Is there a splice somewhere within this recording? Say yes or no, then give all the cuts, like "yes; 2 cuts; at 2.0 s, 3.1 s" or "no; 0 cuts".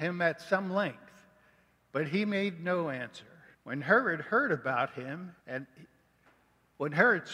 yes; 2 cuts; at 3.5 s, 5.4 s